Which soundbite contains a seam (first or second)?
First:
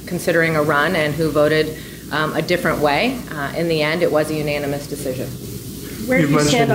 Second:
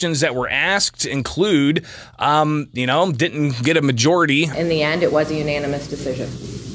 second